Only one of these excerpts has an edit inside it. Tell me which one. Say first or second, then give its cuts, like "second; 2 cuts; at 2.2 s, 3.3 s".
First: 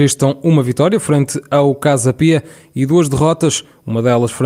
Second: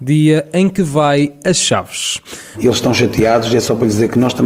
second; 1 cut; at 2.5 s